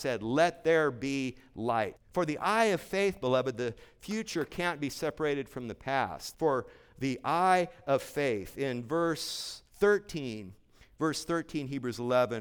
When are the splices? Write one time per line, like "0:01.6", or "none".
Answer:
0:02.0
0:06.3
0:09.7